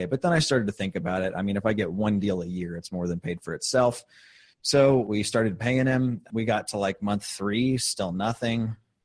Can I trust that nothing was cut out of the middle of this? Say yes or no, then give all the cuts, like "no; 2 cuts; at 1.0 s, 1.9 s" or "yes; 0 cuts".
yes; 0 cuts